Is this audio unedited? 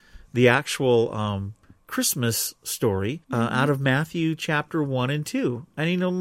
no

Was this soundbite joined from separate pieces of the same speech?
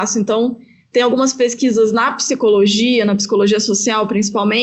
no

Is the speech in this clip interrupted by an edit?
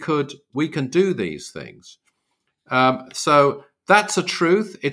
no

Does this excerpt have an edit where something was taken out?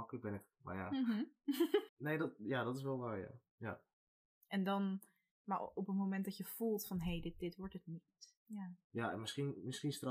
yes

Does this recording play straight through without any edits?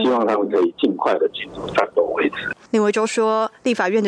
yes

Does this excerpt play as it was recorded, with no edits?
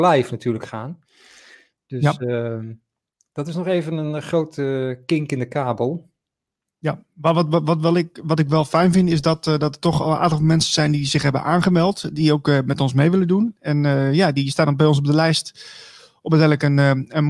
yes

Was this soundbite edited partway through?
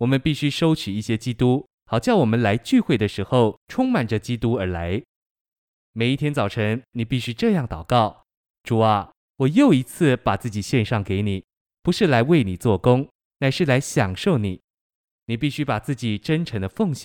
no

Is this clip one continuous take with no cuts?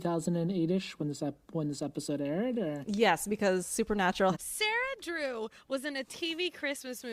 no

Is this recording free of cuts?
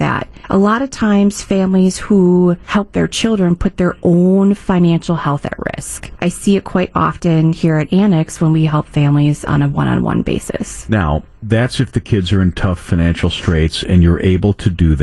yes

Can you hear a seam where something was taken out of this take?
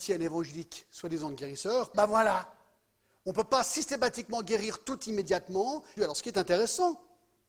yes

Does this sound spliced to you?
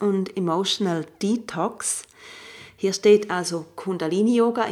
no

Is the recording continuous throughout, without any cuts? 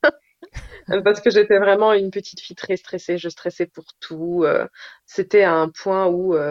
yes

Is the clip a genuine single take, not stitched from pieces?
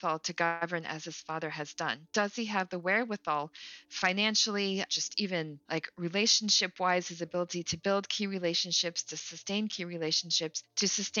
yes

